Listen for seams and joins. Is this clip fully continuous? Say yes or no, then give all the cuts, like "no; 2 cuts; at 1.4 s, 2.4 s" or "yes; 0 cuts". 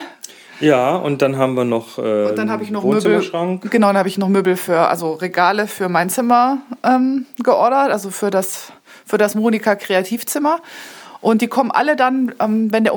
yes; 0 cuts